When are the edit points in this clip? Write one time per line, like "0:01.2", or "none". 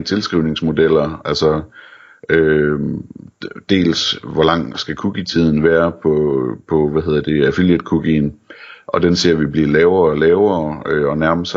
none

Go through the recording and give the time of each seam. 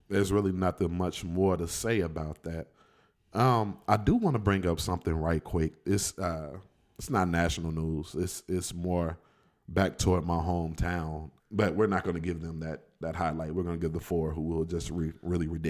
0:11.4

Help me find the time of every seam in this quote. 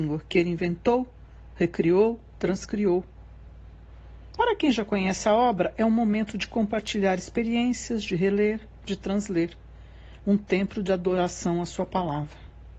0:04.4
0:10.2

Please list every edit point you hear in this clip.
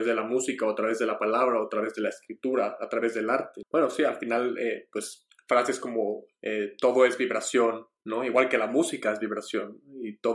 0:03.6

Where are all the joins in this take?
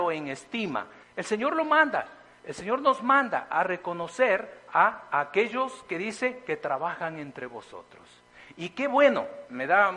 0:01.0

